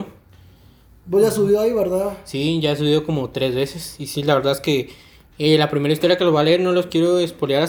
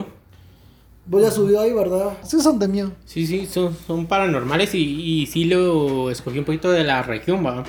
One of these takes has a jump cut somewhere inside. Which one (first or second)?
second